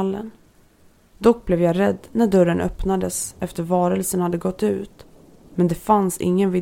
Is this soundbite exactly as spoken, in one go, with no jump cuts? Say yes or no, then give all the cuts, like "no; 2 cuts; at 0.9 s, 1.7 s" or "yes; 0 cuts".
no; 1 cut; at 1.1 s